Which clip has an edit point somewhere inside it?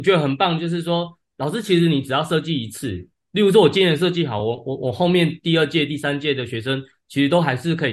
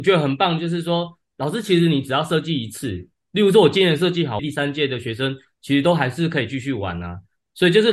second; 1 cut; at 4.4 s

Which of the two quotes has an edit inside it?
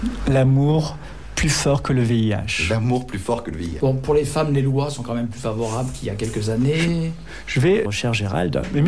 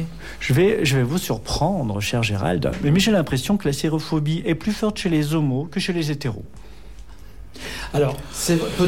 first; 2 cuts; at 3.8 s, 7.8 s

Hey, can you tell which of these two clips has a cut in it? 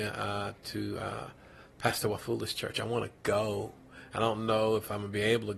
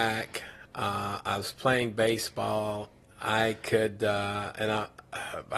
second; 1 cut; at 3.0 s

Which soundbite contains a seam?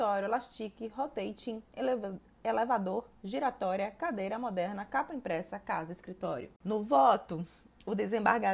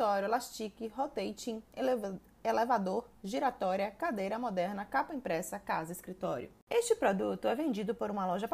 first; 1 cut; at 6.6 s

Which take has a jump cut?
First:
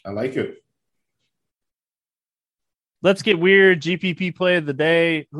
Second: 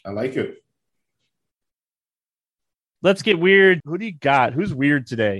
second; 1 cut; at 3.8 s

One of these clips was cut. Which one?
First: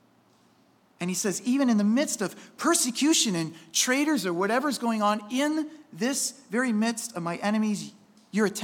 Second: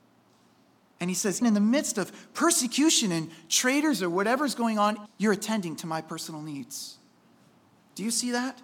second; 2 cuts; at 1.4 s, 5.1 s

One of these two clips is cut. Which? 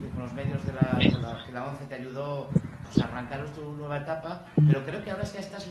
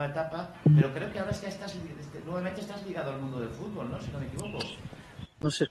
first; 1 cut; at 2.8 s

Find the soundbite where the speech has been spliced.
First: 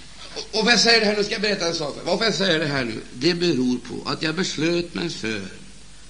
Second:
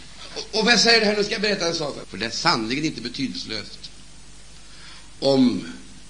second; 1 cut; at 2.0 s

